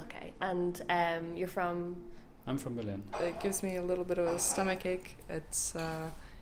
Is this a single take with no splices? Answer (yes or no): no